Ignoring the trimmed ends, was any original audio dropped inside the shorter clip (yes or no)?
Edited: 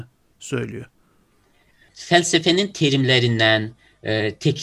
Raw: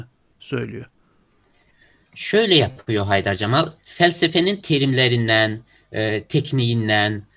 yes